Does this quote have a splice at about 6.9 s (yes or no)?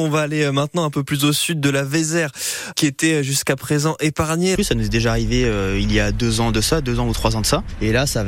no